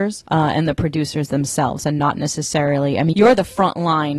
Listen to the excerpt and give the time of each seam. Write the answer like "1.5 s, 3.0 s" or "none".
3.1 s

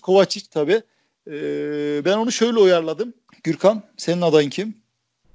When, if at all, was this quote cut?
3.3 s

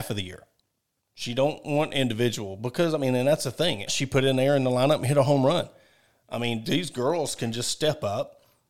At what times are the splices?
3.9 s, 6.6 s

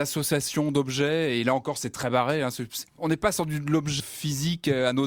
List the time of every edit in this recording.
2.9 s, 4.0 s

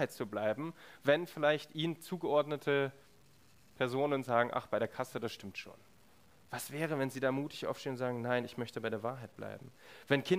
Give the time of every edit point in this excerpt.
none

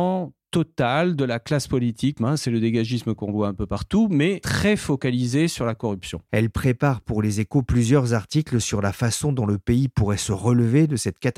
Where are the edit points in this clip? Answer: 2.2 s, 6.3 s

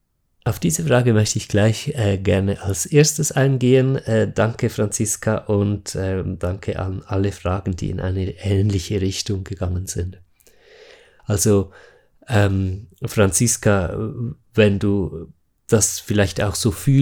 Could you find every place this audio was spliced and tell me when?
11.2 s

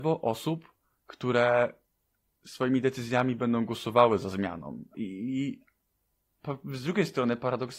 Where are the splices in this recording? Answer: 4.9 s

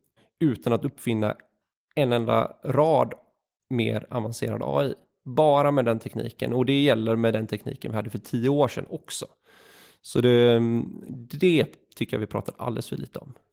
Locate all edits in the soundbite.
none

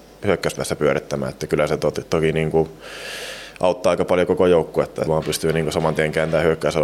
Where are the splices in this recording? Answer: 5.1 s

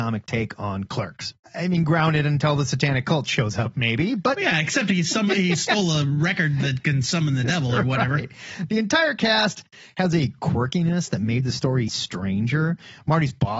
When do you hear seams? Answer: 1.3 s, 11.9 s

